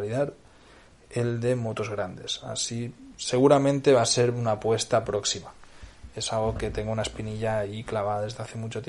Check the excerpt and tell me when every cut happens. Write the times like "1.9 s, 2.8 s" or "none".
3.1 s